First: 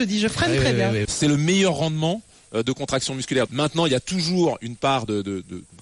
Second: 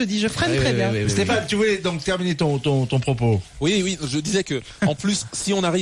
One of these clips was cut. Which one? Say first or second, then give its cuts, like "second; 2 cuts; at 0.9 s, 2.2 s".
first; 2 cuts; at 1.0 s, 3.5 s